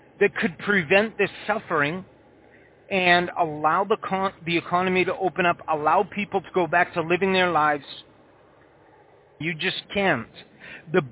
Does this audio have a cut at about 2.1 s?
no; 1 cut; at 9.4 s

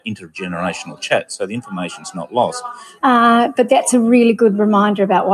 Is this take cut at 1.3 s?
no; 1 cut; at 3.0 s

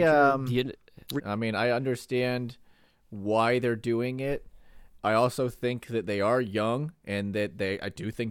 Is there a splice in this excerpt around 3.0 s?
no; 1 cut; at 1.2 s

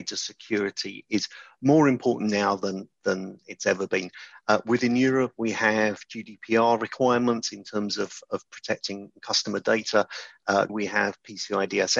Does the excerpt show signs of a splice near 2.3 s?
no; 1 cut; at 10.7 s

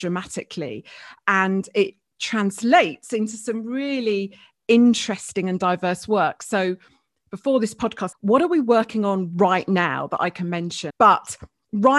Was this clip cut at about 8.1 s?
yes; 2 cuts; at 8.1 s, 10.9 s

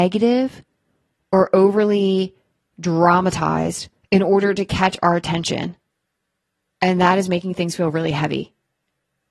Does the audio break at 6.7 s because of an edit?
yes; 1 cut; at 6.7 s

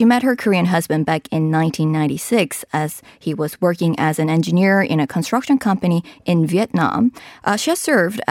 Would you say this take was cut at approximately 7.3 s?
yes; 1 cut; at 7.3 s

